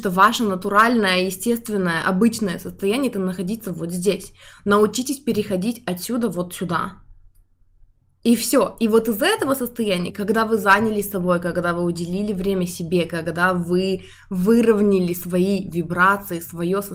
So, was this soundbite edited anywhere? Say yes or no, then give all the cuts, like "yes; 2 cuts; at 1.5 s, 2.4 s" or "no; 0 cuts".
no; 0 cuts